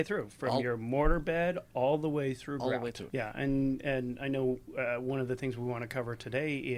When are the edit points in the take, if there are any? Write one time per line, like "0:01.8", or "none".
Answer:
0:03.1